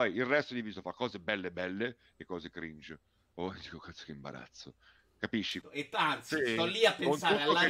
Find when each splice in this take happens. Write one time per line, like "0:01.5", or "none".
0:05.6